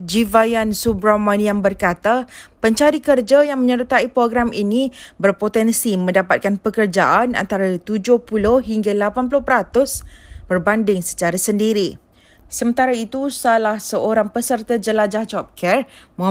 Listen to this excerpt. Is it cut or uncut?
cut